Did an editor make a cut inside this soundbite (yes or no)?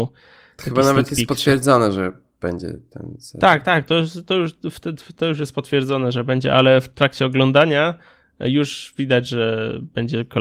no